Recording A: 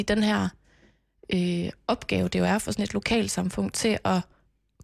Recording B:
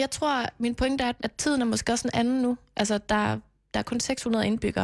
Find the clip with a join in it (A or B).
B